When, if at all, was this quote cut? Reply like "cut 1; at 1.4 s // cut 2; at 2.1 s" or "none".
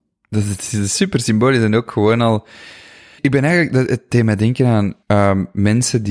cut 1; at 3.2 s // cut 2; at 5.0 s